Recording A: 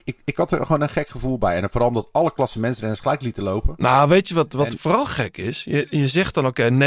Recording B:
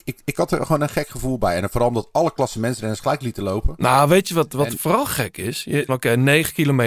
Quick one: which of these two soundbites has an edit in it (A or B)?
B